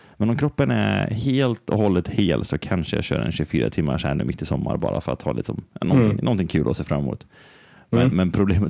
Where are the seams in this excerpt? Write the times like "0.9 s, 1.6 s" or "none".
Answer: none